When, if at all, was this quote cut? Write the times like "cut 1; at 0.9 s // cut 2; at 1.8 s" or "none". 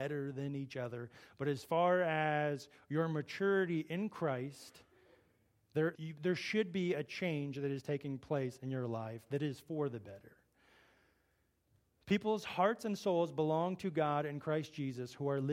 cut 1; at 5.9 s

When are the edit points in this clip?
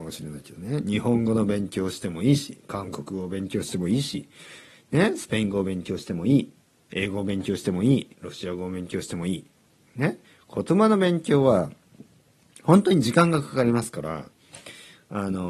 cut 1; at 8.1 s

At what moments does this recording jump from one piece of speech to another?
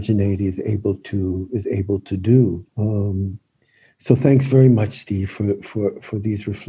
cut 1; at 2.7 s

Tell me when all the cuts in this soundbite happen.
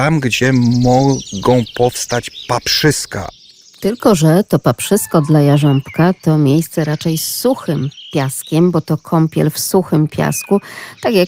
none

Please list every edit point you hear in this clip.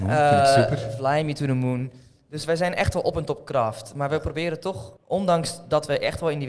cut 1; at 5.0 s

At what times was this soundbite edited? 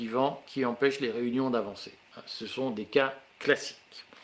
none

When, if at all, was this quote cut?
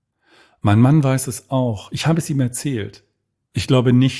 none

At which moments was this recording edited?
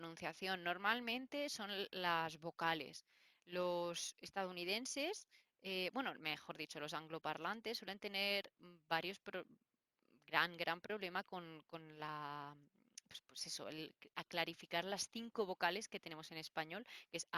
none

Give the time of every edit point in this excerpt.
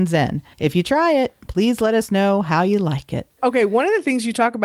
cut 1; at 3.3 s

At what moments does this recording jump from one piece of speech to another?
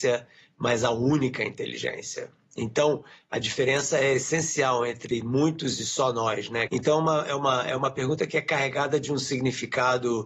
cut 1; at 6.7 s

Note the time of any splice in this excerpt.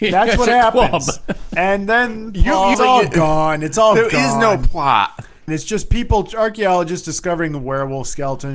cut 1; at 2.7 s // cut 2; at 5.5 s

